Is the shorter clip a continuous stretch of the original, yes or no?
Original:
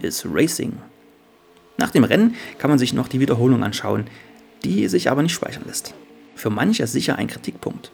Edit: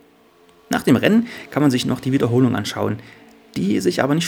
yes